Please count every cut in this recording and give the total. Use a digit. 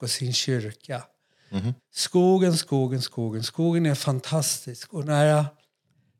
1